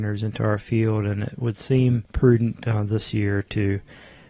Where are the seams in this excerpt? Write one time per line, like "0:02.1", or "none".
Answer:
0:02.1